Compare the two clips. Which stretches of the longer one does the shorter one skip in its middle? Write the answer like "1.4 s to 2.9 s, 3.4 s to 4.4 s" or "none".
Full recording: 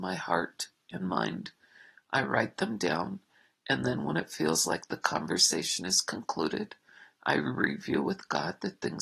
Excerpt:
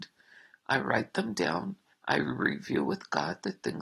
3.4 s to 7.1 s